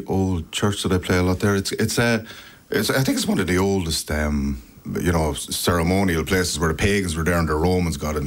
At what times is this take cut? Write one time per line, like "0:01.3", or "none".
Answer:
none